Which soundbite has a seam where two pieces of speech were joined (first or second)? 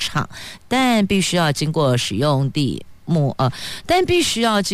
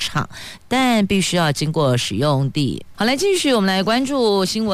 second